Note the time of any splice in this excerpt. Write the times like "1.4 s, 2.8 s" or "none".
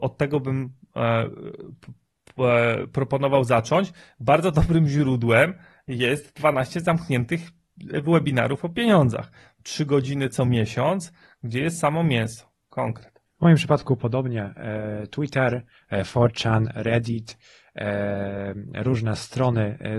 none